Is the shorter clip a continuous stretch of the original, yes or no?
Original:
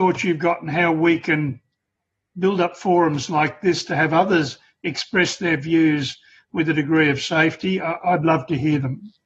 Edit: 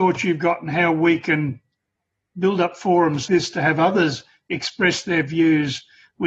no